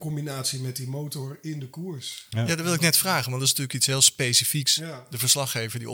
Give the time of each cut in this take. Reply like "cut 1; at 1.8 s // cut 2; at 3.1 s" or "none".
none